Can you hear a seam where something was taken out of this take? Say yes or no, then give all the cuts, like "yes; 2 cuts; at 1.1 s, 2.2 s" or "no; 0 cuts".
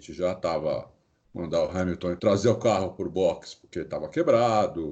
yes; 2 cuts; at 1.1 s, 2.2 s